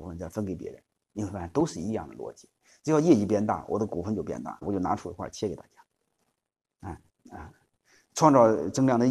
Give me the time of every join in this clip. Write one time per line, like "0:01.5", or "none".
0:04.6
0:07.1